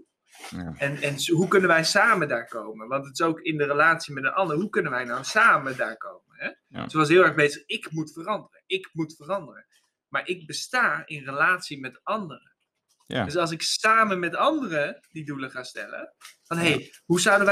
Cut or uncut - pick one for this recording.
uncut